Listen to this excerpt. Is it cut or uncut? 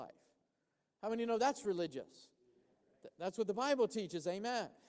uncut